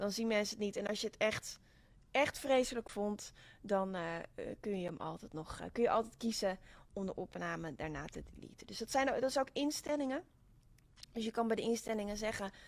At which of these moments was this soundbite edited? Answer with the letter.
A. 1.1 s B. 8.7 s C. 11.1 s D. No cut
D